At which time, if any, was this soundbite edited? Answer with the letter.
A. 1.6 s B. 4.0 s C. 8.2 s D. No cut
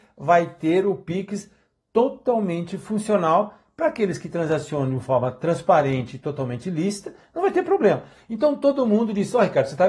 C